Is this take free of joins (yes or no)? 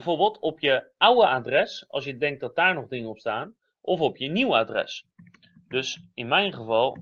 yes